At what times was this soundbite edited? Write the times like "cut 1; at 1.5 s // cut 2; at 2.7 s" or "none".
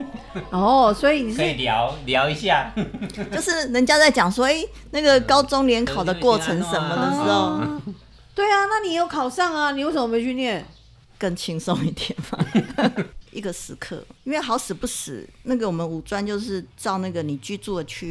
cut 1; at 11.0 s // cut 2; at 13.2 s